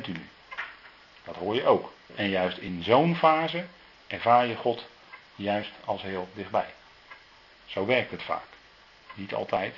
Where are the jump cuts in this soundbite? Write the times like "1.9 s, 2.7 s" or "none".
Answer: 2.1 s